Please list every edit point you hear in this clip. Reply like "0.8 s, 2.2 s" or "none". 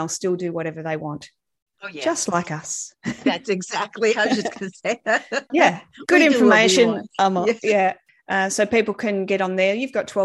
5.5 s, 8.1 s